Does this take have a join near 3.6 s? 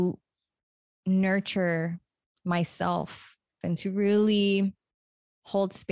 yes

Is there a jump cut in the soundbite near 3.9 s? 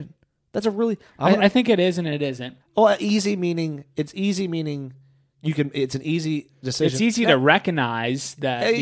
no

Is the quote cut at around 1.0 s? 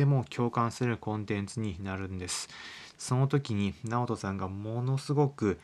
no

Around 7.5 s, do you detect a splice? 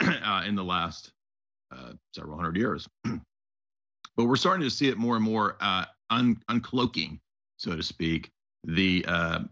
no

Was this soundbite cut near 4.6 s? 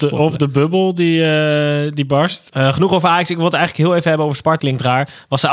yes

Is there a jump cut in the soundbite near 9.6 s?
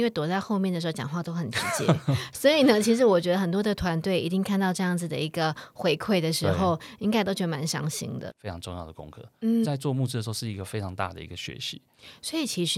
yes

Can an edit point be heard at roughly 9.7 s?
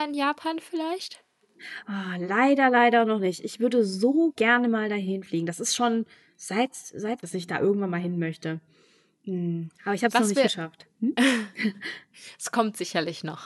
no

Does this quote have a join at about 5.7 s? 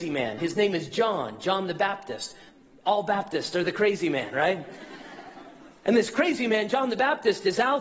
no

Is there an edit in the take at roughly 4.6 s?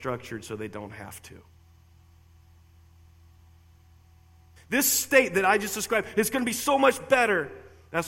yes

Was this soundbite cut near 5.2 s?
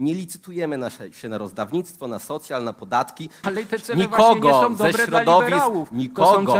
no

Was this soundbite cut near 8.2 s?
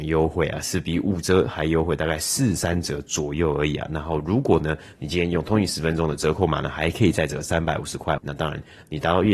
yes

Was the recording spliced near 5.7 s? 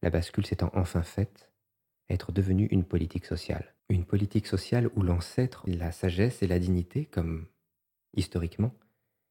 yes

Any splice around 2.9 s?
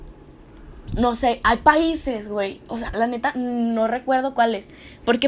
yes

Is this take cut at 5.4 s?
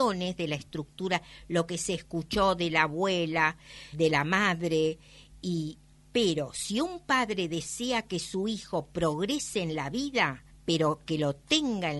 no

